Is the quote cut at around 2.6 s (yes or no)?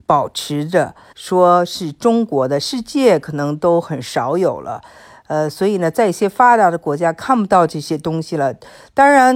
no